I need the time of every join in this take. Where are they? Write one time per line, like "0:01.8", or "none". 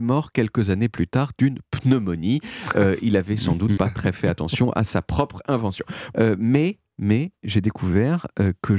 0:03.8
0:06.1
0:07.4